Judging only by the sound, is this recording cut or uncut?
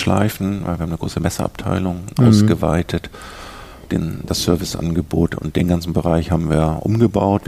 uncut